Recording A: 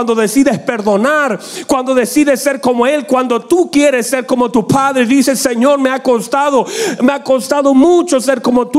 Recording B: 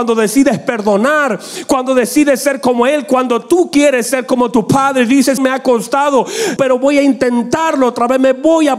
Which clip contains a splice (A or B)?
B